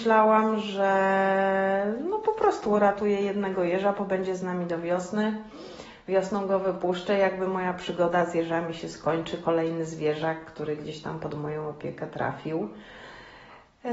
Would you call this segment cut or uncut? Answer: uncut